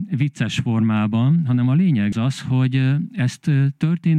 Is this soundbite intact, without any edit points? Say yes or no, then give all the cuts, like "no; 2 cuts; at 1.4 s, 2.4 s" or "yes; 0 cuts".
no; 1 cut; at 2.1 s